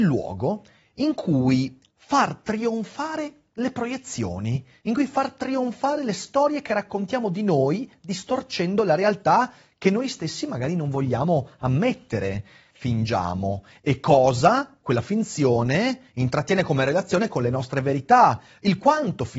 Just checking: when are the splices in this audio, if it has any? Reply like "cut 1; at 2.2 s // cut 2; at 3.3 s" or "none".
cut 1; at 12.7 s